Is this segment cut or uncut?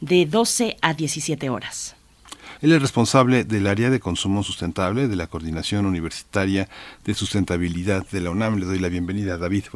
cut